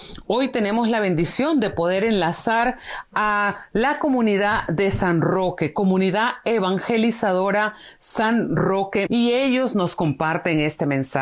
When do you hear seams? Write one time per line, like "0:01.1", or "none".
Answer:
0:09.1